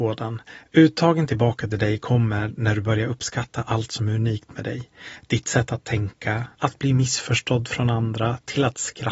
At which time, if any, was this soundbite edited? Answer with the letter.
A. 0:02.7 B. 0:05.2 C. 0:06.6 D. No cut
C